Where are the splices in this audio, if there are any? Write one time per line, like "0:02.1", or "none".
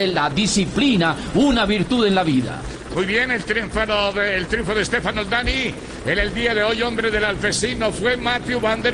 none